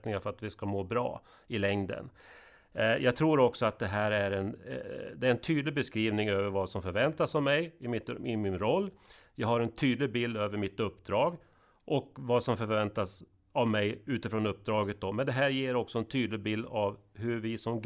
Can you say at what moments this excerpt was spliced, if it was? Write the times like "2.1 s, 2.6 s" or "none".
none